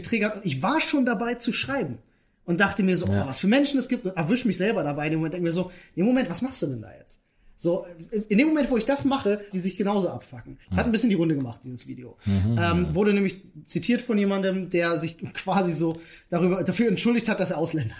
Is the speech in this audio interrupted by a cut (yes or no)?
yes